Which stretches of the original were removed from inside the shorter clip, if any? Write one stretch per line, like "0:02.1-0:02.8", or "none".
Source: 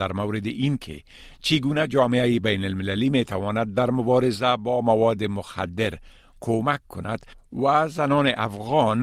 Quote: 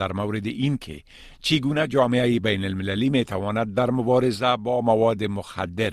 none